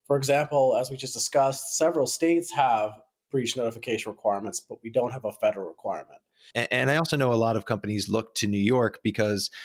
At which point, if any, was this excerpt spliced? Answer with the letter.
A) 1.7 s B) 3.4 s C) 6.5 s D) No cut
C